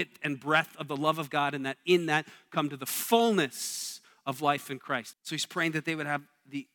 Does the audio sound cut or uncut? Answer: cut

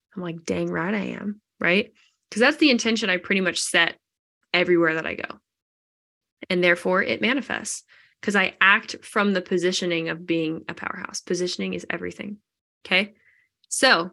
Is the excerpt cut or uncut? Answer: uncut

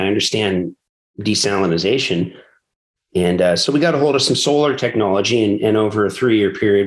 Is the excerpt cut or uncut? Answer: uncut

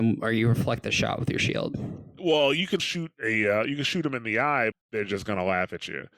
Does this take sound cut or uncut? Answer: cut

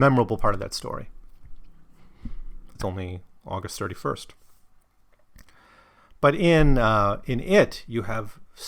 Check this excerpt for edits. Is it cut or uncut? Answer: cut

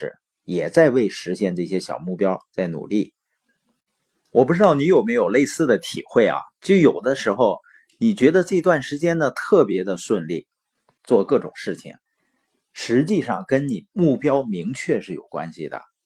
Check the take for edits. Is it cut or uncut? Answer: cut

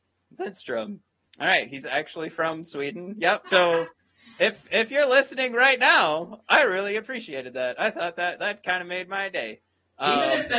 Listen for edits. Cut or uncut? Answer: cut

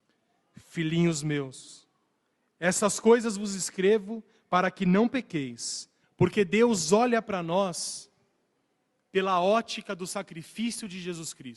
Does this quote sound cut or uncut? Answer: cut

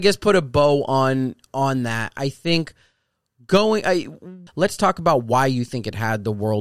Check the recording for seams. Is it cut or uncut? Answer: cut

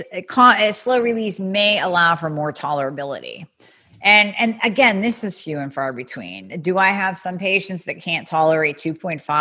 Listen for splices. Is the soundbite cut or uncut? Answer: uncut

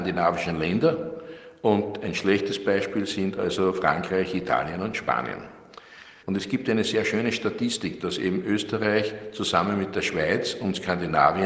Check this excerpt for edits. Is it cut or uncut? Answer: cut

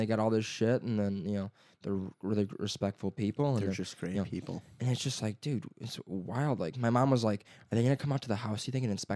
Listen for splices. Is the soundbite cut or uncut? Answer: uncut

